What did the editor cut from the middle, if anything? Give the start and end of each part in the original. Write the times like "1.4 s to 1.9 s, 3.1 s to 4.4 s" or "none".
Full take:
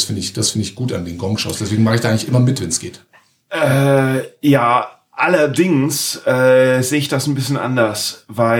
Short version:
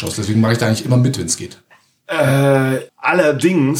4.3 s to 5.0 s